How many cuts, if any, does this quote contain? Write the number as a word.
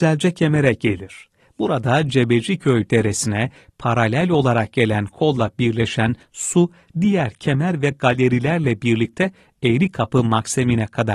zero